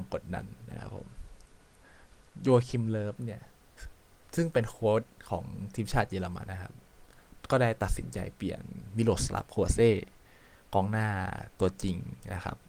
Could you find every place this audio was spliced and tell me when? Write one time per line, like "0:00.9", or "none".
0:06.4